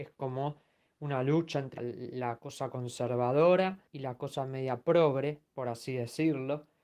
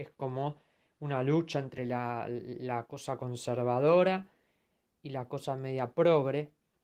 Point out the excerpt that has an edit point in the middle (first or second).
first